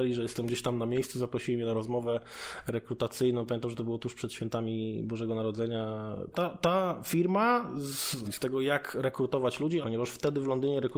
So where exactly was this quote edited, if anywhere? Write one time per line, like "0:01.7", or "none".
0:06.3
0:08.2
0:09.8